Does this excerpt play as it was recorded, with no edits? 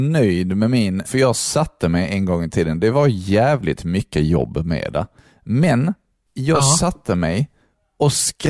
no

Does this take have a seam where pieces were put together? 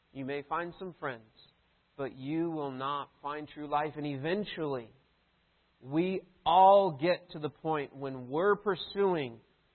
no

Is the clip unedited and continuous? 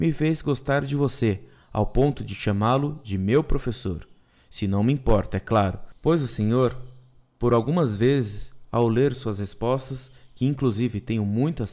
yes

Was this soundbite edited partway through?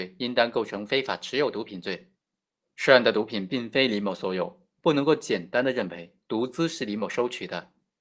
no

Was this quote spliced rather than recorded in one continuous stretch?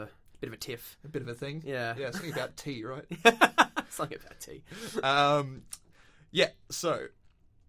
no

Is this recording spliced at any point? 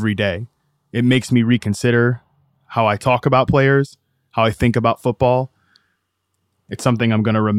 no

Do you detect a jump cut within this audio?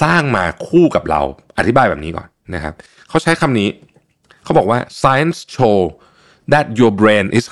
no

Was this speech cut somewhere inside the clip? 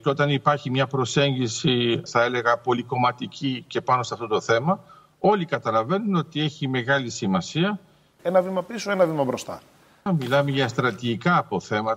yes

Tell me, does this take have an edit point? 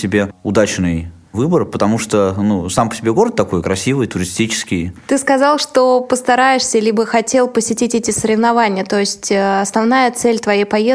no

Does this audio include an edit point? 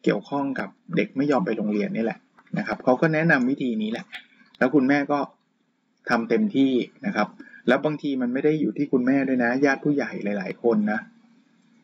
no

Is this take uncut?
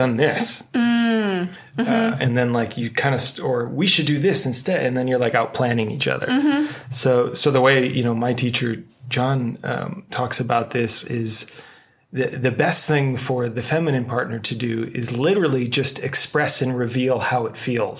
yes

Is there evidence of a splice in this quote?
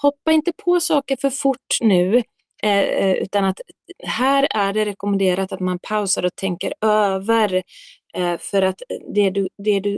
no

